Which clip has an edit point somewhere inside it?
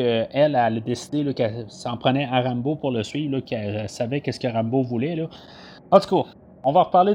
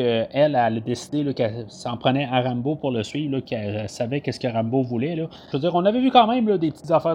second; 1 cut; at 5.5 s

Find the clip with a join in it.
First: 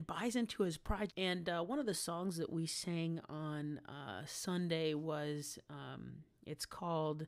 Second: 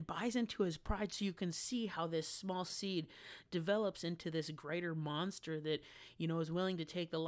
first; 1 cut; at 1.1 s

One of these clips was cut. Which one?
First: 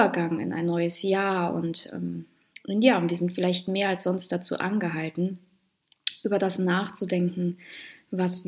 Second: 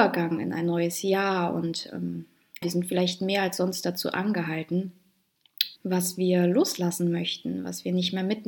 second; 2 cuts; at 2.6 s, 5.8 s

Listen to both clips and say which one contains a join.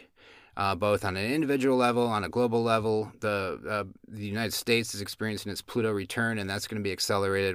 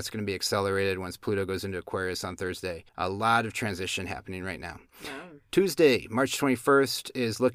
second; 1 cut; at 2.9 s

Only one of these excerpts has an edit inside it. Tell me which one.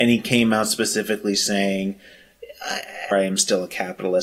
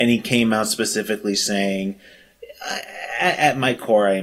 first; 1 cut; at 3.1 s

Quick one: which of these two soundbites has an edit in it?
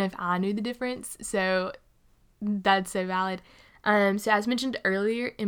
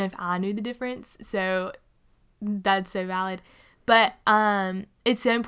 first; 1 cut; at 3.7 s

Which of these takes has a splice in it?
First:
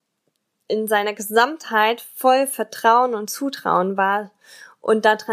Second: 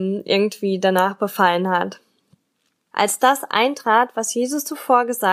second; 1 cut; at 2.9 s

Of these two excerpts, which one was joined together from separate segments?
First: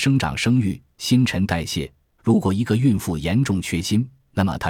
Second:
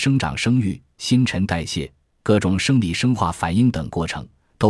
first; 1 cut; at 2.2 s

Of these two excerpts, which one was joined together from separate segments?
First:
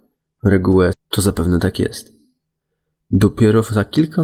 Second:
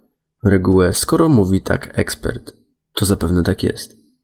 first; 1 cut; at 0.9 s

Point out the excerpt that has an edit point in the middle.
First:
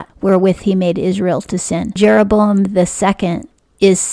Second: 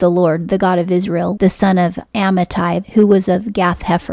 second; 2 cuts; at 1.4 s, 2.8 s

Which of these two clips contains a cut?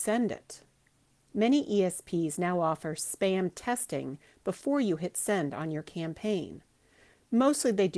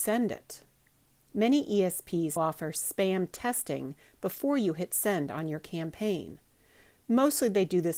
second; 1 cut; at 2.4 s

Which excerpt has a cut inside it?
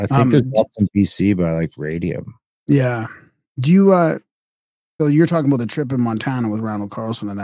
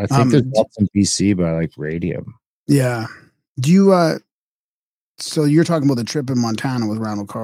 first; 1 cut; at 5.0 s

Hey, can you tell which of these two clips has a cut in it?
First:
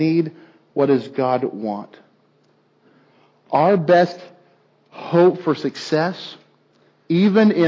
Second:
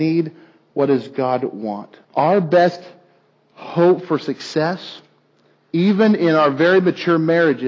second; 1 cut; at 2.0 s

